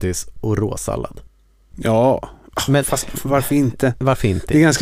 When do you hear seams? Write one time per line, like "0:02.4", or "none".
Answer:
0:01.7

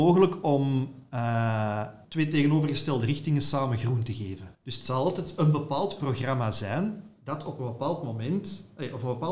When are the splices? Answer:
0:02.0
0:04.5

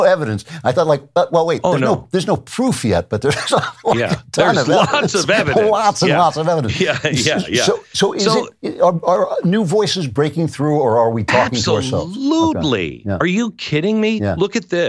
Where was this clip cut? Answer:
none

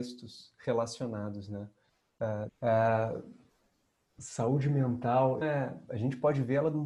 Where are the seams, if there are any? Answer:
0:02.5
0:05.4

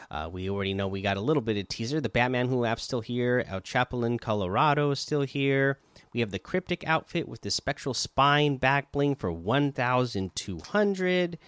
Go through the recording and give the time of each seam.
none

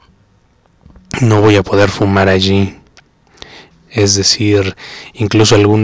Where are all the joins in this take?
0:03.7

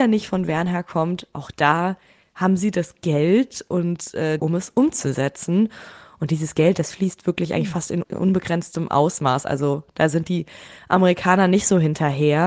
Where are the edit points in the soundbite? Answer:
0:04.4

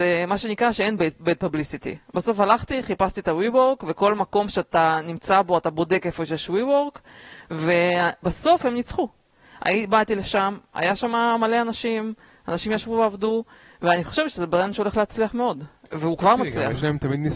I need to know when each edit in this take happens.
none

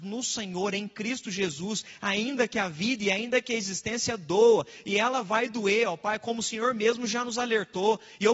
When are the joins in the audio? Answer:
none

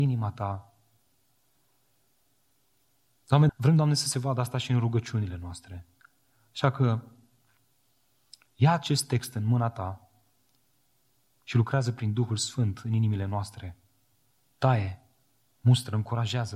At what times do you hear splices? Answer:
0:03.5

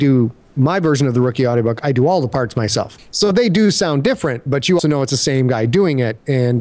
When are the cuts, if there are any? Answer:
0:03.0
0:04.8

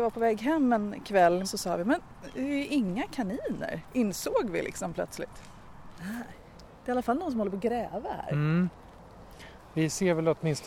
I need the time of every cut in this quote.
0:01.4
0:06.0

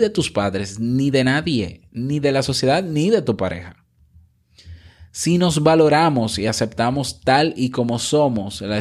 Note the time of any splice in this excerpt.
none

